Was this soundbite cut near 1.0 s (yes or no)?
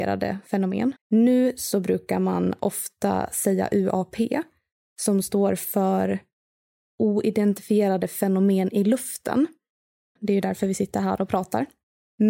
yes